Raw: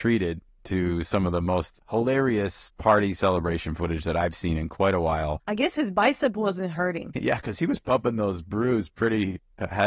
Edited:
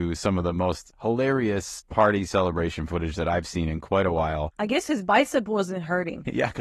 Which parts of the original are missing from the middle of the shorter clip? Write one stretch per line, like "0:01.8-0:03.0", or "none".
none